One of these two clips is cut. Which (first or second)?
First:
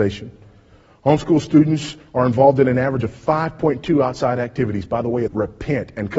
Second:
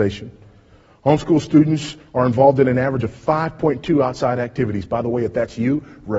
first